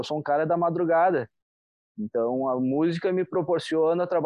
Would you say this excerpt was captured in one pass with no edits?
yes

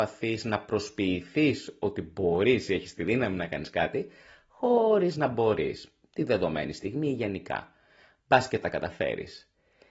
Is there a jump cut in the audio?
no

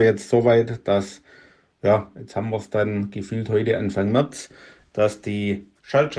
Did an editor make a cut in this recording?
no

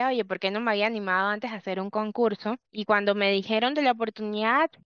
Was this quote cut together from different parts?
yes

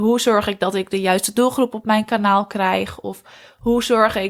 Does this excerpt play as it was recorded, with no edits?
yes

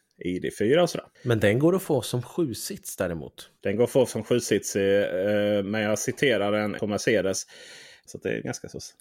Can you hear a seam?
yes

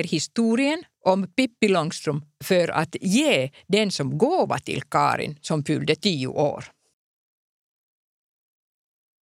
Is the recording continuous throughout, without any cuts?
yes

